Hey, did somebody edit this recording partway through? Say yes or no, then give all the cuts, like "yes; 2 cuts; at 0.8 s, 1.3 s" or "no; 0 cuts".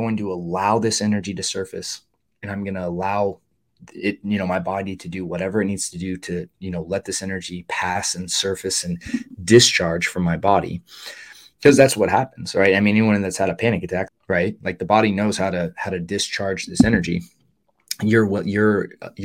yes; 1 cut; at 14.1 s